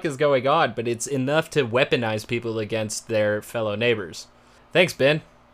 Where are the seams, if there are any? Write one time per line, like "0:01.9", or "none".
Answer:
0:04.6